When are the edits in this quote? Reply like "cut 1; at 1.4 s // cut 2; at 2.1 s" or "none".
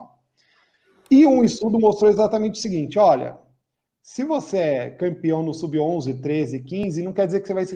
none